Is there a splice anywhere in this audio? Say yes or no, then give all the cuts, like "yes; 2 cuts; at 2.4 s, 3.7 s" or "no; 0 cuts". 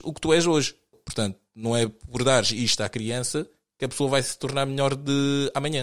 yes; 1 cut; at 0.9 s